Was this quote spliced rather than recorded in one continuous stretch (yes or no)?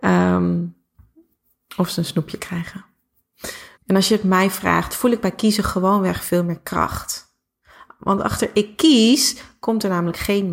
yes